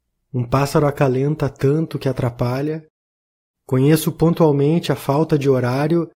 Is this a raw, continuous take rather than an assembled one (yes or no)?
no